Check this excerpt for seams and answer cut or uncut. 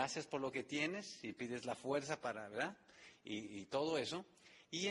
uncut